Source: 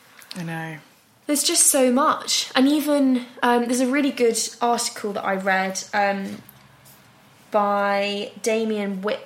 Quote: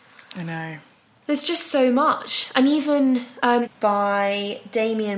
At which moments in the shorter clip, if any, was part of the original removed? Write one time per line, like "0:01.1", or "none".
0:03.7